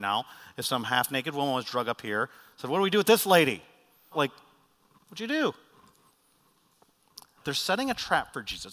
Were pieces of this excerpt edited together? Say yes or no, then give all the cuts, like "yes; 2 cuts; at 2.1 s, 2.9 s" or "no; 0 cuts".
yes; 2 cuts; at 4.1 s, 7.4 s